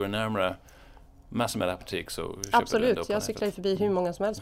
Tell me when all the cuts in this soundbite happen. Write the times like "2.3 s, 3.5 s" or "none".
none